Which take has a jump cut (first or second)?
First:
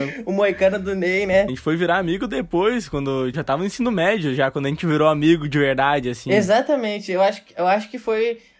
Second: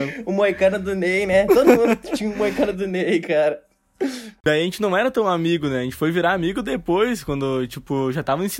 first